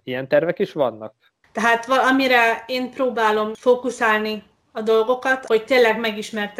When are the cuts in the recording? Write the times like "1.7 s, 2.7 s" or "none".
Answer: 1.4 s, 5.5 s